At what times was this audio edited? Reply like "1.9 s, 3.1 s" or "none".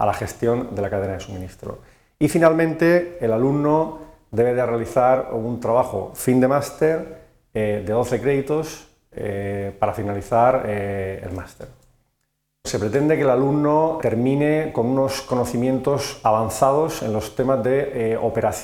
12.6 s, 14.0 s